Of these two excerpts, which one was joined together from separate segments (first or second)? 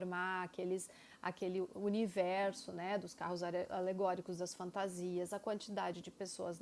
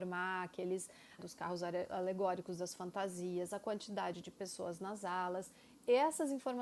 second